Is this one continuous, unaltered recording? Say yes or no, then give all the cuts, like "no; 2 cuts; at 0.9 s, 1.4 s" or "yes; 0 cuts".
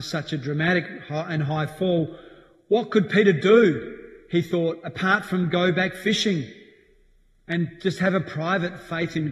yes; 0 cuts